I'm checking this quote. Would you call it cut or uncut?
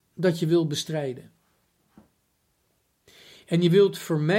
uncut